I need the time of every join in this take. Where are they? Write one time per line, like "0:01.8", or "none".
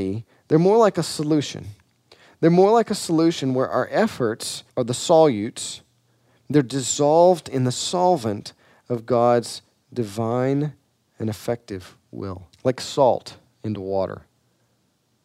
0:04.7
0:12.5